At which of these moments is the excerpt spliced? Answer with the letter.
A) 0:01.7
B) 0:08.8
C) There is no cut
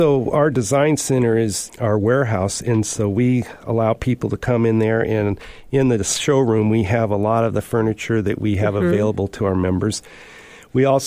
A